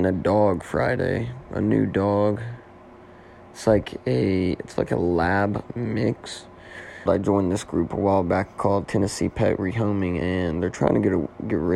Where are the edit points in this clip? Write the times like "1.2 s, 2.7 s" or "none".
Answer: 7.1 s, 8.8 s